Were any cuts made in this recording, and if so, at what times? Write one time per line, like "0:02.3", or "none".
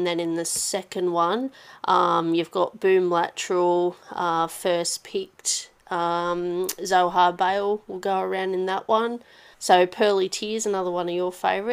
0:09.5